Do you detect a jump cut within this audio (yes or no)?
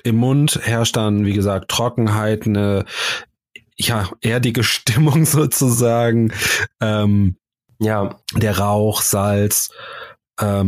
no